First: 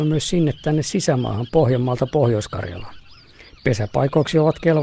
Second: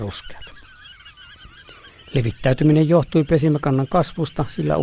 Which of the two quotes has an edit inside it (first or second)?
second